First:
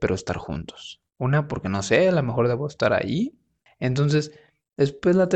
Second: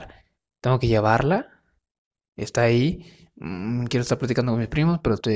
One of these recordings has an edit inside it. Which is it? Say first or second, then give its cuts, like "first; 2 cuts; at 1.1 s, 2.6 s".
first; 2 cuts; at 1.1 s, 3.7 s